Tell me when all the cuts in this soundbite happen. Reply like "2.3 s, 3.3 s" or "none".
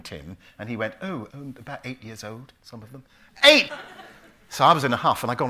1.3 s, 3.7 s